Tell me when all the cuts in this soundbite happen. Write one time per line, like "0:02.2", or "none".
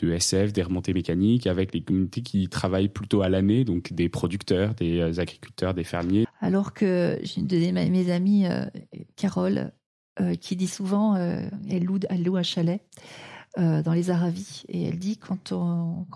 0:06.2